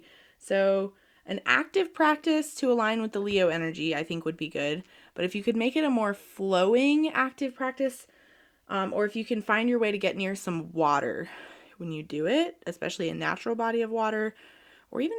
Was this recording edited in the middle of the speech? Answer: no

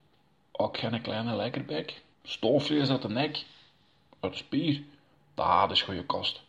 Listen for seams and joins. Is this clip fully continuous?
no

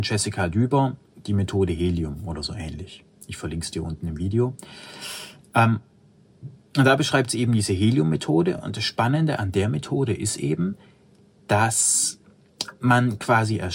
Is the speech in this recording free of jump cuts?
yes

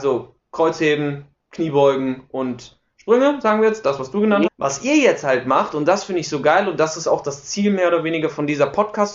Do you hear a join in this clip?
yes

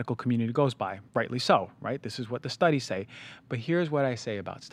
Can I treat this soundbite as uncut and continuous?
no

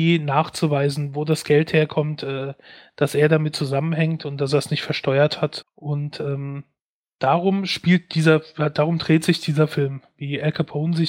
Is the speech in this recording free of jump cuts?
no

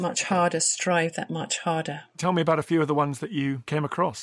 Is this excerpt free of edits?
yes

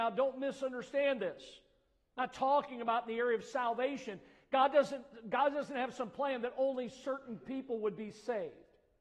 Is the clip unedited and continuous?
yes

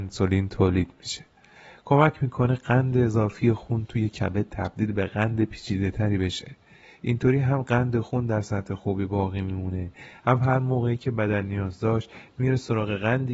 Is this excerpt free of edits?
yes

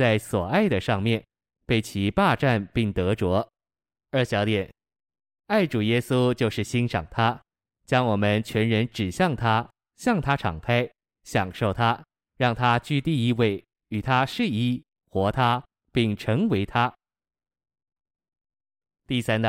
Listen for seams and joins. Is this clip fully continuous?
no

